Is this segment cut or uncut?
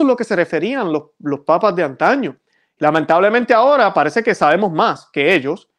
uncut